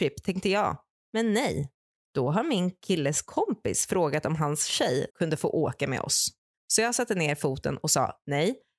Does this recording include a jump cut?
yes; 2 cuts; at 5.1 s, 6.5 s

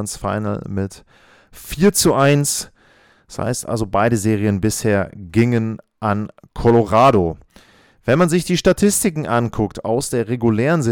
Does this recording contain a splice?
no; 0 cuts

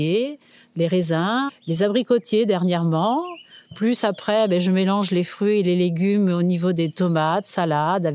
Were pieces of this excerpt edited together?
yes; 1 cut; at 1.5 s

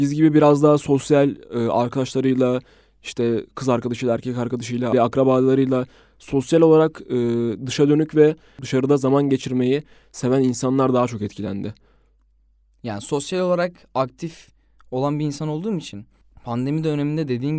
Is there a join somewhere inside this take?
yes; 1 cut; at 4.9 s

